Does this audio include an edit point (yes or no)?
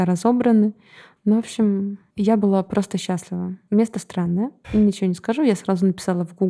no